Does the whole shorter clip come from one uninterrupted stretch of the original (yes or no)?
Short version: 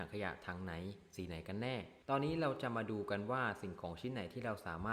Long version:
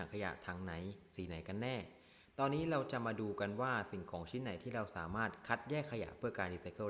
no